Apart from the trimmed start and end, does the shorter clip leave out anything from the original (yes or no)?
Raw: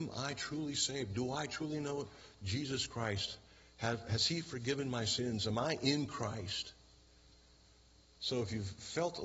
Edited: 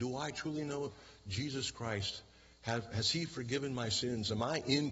no